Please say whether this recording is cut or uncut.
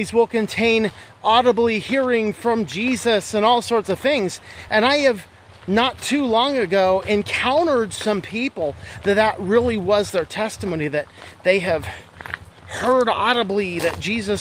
uncut